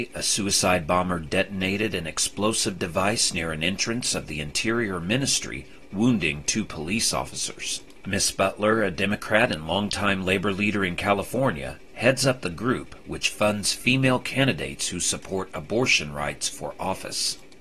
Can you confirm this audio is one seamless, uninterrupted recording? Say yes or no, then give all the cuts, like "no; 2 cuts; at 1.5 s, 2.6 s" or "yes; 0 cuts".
no; 1 cut; at 8.0 s